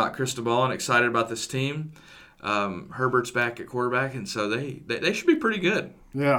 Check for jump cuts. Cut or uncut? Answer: uncut